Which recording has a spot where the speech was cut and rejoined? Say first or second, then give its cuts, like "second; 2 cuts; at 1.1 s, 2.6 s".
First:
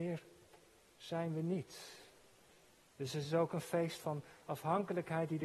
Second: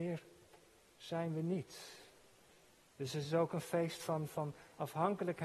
first; 1 cut; at 4.0 s